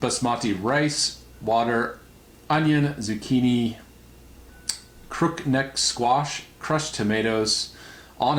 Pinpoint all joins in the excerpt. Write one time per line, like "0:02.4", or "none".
none